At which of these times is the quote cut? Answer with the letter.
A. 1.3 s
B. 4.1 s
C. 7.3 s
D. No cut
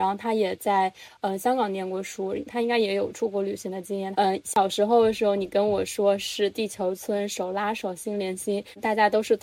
B